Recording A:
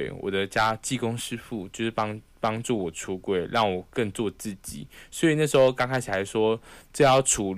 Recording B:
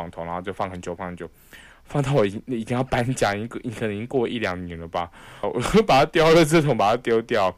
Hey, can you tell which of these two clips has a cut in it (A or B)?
B